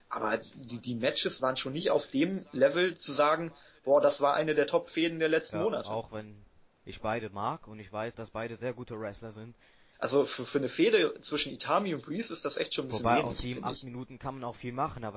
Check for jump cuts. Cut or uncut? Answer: cut